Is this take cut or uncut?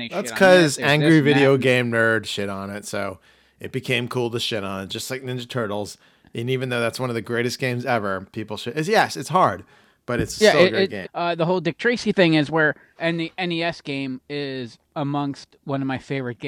cut